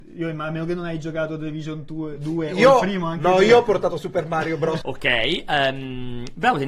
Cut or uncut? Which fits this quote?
cut